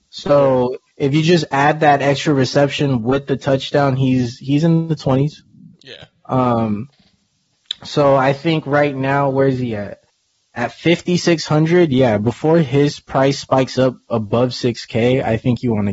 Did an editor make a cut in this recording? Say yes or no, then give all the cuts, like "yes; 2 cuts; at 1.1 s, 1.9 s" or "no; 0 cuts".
no; 0 cuts